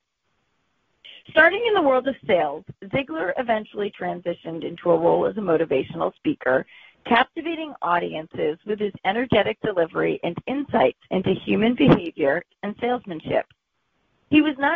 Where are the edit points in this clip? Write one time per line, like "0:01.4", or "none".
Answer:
0:12.5